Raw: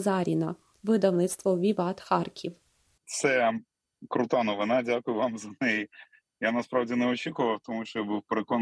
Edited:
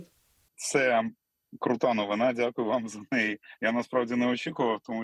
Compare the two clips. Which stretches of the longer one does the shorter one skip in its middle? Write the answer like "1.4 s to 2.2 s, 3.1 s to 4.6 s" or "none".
6.1 s to 6.4 s